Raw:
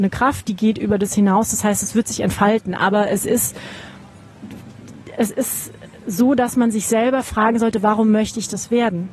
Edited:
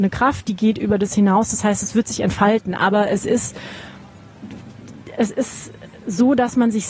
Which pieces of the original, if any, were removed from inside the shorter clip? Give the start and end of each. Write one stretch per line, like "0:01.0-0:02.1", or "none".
none